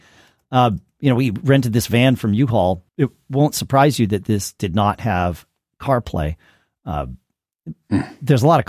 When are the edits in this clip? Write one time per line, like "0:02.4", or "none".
0:02.9